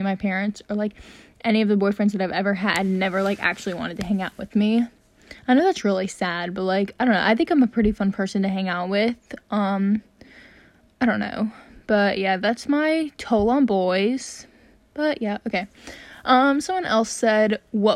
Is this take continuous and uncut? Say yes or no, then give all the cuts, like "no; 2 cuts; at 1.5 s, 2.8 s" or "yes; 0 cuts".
yes; 0 cuts